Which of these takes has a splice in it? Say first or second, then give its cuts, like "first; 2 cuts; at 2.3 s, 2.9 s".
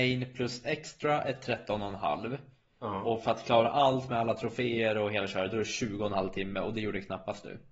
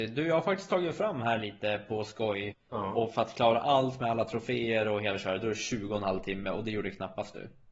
second; 1 cut; at 2.5 s